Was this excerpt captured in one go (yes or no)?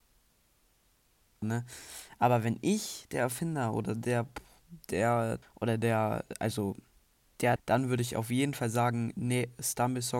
no